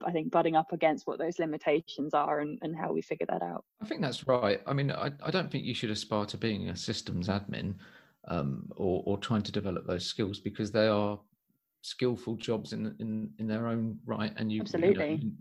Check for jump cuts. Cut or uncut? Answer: uncut